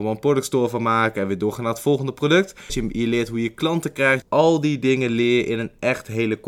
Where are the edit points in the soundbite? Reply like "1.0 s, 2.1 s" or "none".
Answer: 2.7 s, 4.2 s